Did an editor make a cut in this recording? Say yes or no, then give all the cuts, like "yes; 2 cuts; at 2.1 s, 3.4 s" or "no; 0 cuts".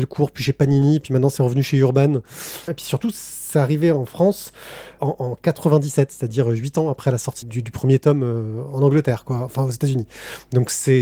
yes; 3 cuts; at 2.7 s, 5.0 s, 7.4 s